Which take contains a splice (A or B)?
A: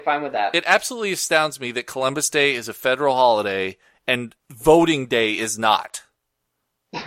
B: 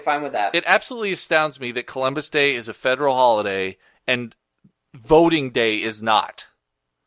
A